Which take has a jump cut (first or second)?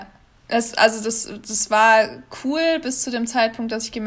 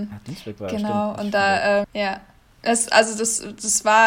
second